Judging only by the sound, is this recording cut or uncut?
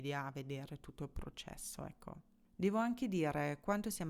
uncut